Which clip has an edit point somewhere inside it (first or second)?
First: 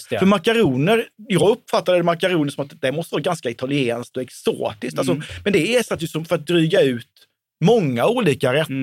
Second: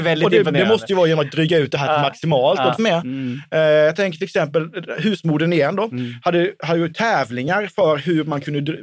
second